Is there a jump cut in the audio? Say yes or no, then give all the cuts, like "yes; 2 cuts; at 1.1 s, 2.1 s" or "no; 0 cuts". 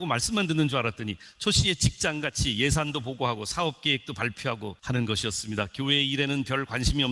yes; 1 cut; at 4.8 s